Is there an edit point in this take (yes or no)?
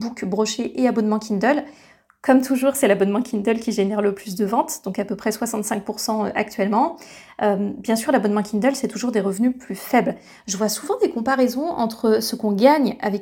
no